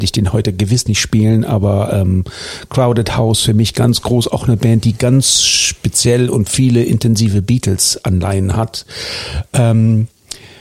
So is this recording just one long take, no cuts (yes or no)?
yes